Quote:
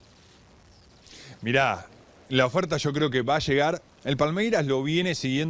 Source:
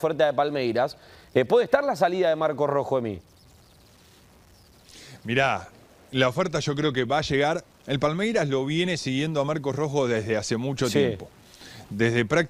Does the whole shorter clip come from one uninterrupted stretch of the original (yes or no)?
yes